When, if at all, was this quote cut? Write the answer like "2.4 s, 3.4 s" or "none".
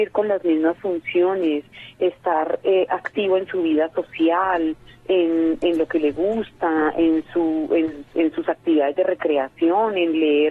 none